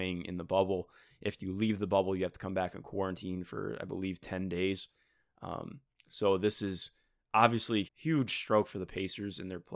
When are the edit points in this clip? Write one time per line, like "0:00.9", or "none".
0:07.8